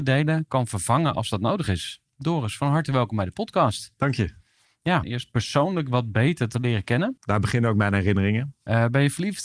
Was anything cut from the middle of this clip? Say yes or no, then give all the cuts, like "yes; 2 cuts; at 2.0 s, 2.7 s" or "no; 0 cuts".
yes; 2 cuts; at 5.0 s, 7.2 s